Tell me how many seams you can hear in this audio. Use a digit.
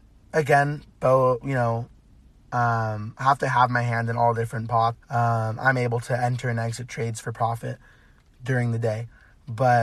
1